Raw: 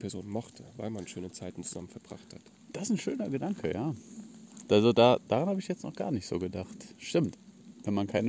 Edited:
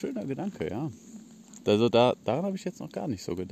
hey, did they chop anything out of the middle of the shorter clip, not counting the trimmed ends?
no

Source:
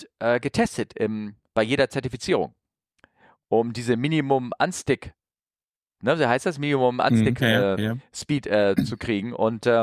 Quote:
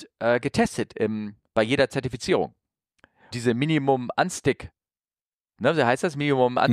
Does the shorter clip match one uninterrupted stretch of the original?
no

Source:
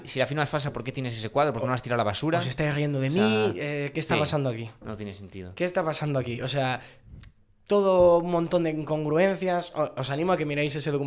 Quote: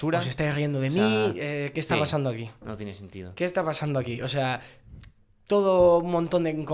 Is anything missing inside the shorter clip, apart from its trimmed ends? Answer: no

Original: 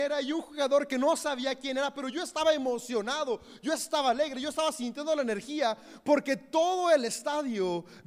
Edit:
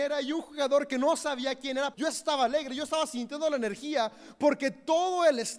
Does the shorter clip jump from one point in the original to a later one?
yes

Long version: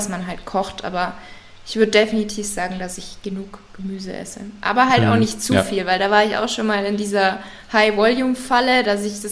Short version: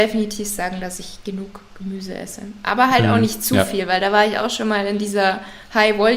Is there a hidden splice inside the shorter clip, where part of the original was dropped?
no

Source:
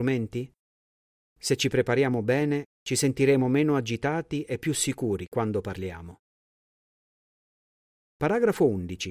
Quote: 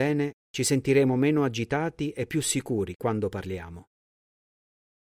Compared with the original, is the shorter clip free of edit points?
yes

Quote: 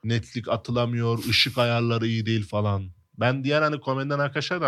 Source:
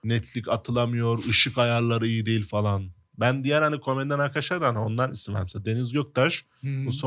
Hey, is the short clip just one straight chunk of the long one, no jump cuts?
yes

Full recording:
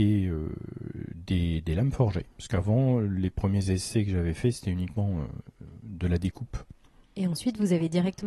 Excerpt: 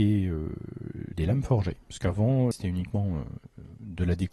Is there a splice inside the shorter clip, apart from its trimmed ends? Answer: yes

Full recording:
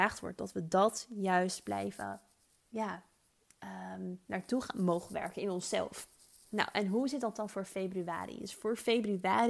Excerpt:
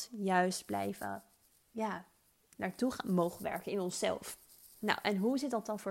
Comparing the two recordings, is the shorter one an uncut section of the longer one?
no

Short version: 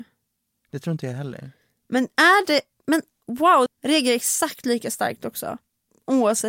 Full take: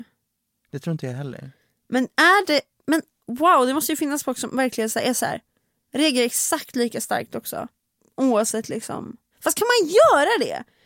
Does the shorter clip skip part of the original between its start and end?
yes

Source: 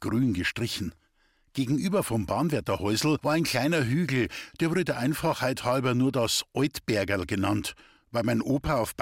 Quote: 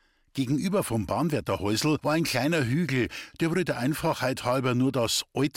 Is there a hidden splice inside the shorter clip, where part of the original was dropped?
no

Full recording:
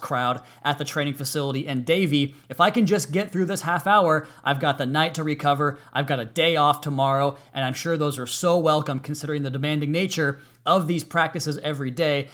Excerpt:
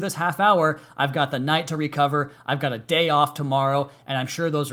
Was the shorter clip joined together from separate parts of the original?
no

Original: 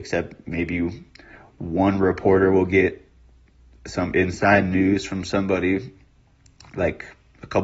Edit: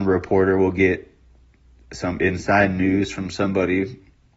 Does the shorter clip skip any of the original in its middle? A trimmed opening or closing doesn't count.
no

